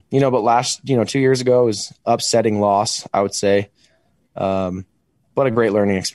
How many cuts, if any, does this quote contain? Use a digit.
0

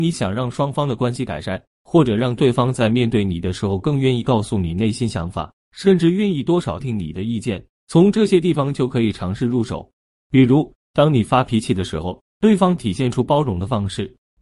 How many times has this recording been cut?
1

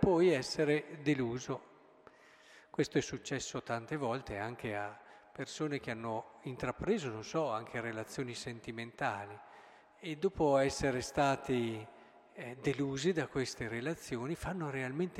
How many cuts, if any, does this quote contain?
0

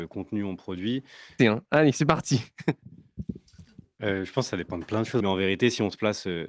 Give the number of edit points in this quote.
2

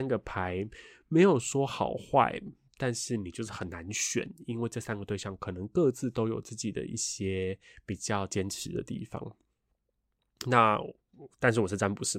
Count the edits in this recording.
0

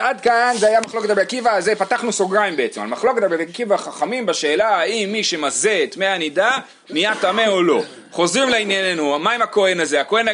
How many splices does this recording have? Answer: 0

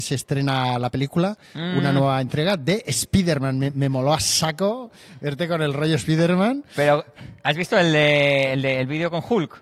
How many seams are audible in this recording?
0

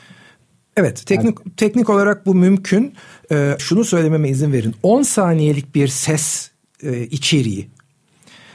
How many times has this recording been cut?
1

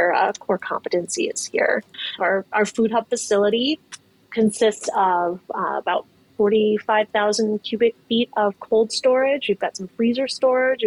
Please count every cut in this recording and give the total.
1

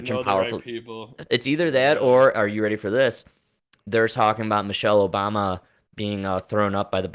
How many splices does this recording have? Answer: 1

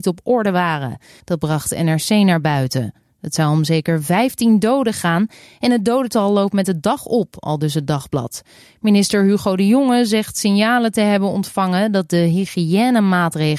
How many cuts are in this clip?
1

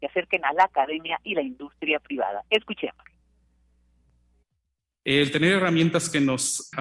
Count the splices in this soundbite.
0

